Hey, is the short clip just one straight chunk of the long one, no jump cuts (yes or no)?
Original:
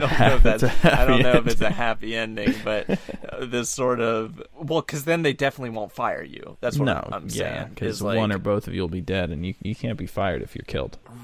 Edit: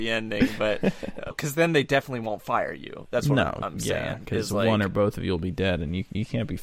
no